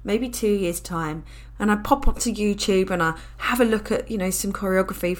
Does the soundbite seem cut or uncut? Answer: cut